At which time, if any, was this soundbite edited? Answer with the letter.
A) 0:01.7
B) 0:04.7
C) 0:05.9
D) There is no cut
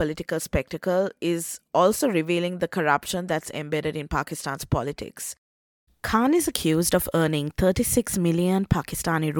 C